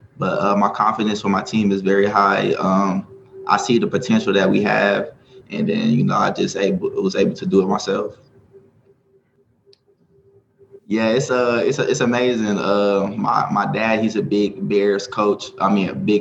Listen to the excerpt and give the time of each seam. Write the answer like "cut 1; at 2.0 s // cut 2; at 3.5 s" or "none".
cut 1; at 5.4 s // cut 2; at 10.8 s